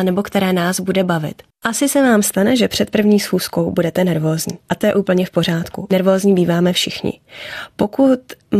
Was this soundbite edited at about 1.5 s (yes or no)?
yes